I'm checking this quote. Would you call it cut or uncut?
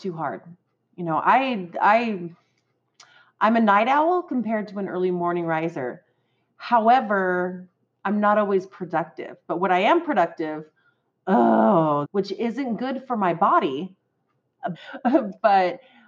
cut